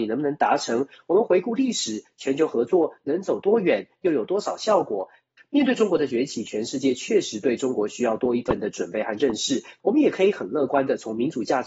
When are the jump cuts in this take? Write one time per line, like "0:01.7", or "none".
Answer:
0:05.4
0:09.8